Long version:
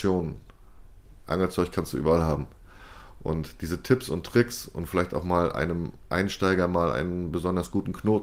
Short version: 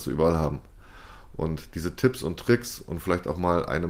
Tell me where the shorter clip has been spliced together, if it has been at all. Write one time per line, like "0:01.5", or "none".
none

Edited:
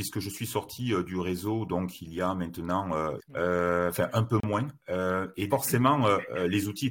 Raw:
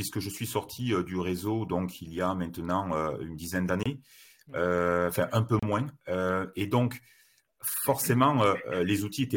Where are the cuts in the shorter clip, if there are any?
0:03.2
0:05.5

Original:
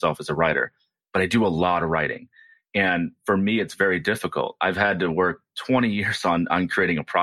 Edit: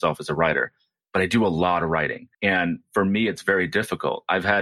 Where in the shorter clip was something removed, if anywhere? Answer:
0:02.3

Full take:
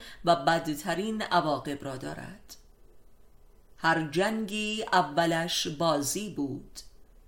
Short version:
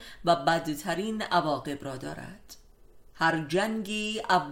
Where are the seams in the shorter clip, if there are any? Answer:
0:03.1

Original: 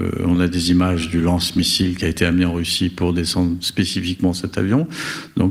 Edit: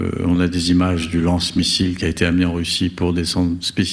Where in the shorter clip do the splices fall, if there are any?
none

